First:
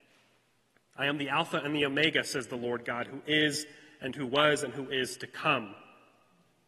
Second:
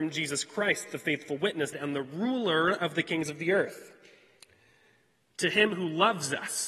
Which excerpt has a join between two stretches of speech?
second; 1 cut; at 1.7 s

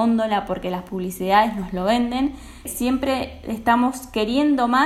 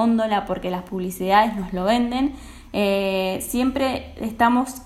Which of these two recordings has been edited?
first; 1 cut; at 2.7 s

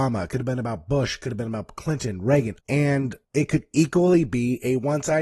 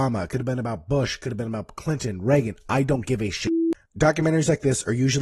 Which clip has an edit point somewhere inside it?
first; 1 cut; at 2.6 s

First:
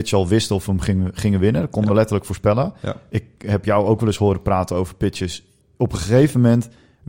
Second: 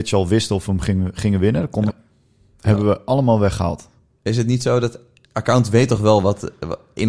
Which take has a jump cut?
second; 2 cuts; at 1.9 s, 5.2 s

